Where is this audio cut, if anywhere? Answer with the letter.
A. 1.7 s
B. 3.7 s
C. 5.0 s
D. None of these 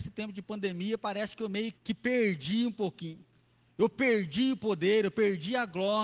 A